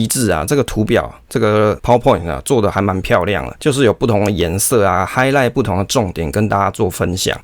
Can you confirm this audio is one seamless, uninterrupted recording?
yes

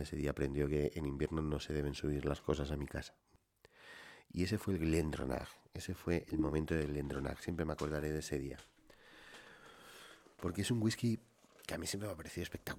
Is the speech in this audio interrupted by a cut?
no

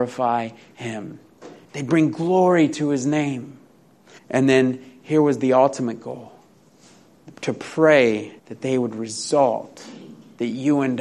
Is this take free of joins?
no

